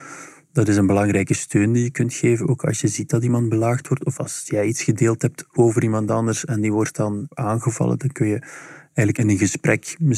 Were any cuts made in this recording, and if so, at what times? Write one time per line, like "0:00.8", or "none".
0:04.2